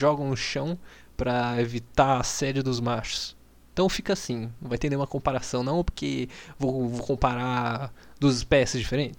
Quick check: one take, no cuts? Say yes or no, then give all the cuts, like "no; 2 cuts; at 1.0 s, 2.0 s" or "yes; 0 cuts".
yes; 0 cuts